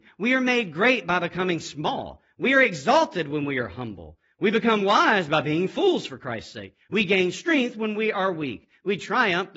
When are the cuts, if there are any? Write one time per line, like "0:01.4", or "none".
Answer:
0:06.9